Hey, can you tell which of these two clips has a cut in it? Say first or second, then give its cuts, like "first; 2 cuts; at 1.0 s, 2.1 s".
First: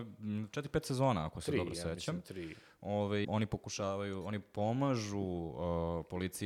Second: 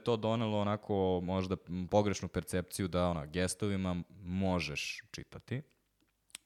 first; 1 cut; at 3.2 s